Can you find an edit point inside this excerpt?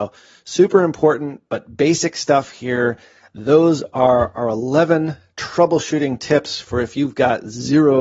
no; 0 cuts

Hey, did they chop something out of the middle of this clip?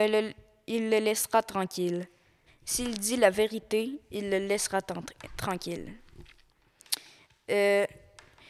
yes; 1 cut; at 2.5 s

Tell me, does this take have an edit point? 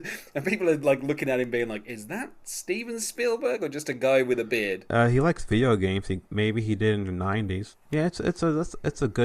yes; 1 cut; at 7.7 s

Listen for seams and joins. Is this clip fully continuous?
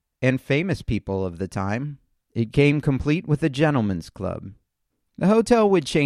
yes; 0 cuts

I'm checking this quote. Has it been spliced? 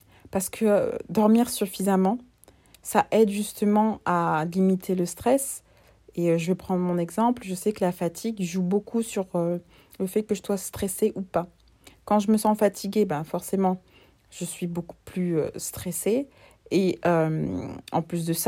no; 0 cuts

